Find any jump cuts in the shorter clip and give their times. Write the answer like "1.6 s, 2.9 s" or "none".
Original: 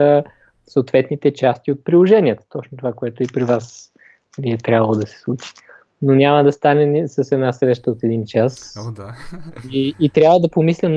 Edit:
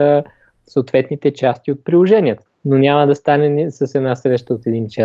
2.5 s